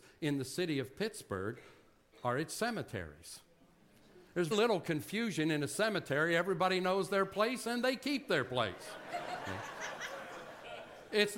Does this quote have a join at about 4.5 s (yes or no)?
yes